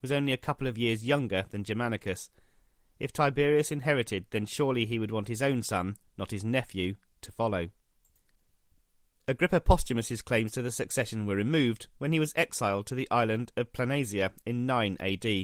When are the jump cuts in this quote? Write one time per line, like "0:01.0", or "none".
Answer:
none